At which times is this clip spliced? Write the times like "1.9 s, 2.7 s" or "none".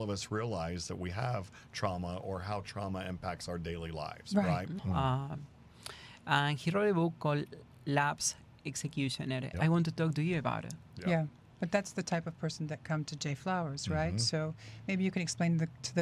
4.8 s, 9.5 s